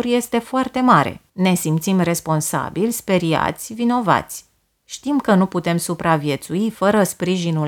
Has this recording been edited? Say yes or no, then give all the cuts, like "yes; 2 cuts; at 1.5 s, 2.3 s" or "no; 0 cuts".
yes; 1 cut; at 1.3 s